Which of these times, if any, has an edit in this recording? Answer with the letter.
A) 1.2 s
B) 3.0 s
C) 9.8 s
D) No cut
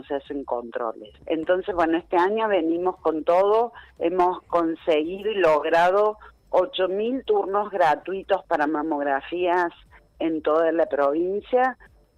A